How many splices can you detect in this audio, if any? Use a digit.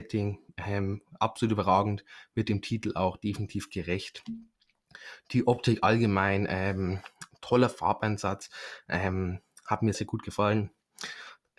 2